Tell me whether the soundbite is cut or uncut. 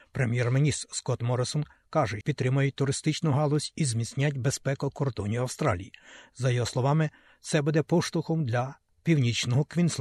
cut